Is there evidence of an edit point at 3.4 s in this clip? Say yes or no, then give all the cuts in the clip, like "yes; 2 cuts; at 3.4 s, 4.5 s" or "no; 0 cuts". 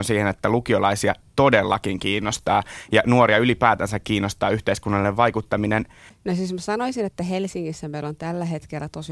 no; 1 cut; at 6.1 s